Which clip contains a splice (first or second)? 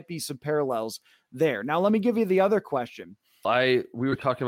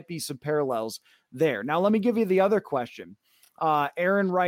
first